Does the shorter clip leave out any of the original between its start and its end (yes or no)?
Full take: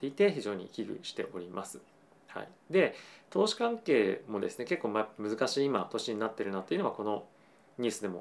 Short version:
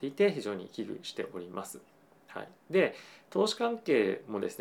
no